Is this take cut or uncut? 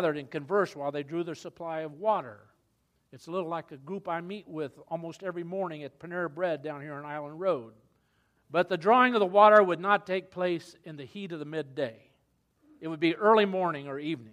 cut